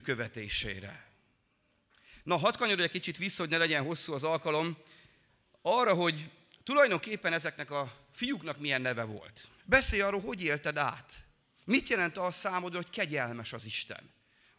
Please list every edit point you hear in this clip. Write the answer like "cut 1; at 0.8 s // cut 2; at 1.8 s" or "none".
cut 1; at 9.6 s